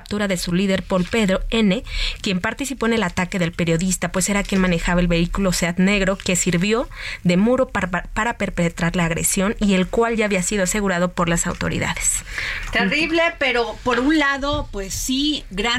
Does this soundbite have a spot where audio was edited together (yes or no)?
no